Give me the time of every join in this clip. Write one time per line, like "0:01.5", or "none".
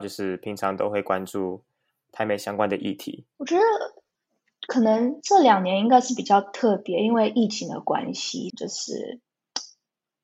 0:03.4
0:05.2
0:08.5